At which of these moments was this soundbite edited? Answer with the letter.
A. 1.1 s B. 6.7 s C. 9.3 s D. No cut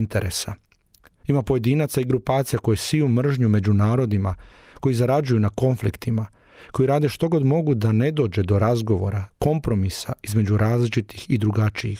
C